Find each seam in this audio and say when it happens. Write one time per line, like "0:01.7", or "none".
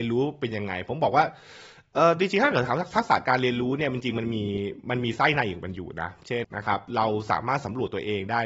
0:06.4

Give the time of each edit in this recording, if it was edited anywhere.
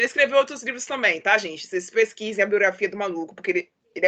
none

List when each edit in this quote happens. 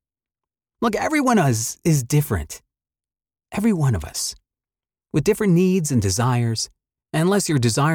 none

